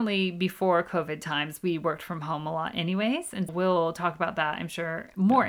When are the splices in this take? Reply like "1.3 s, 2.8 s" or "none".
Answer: 3.5 s